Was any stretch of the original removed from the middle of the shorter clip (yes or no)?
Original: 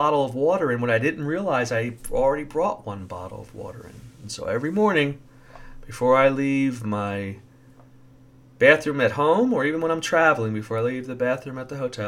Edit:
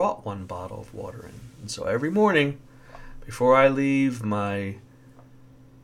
no